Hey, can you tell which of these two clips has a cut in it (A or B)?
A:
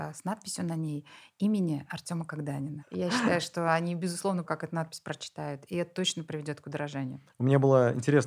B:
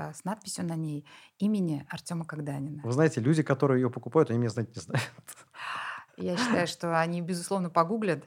A